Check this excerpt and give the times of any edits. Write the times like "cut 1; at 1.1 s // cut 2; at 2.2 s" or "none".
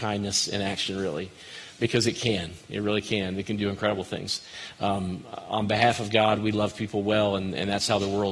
none